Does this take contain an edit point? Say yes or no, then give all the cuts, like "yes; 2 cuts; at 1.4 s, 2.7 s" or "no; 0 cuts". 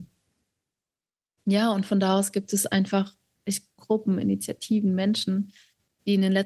yes; 1 cut; at 3.8 s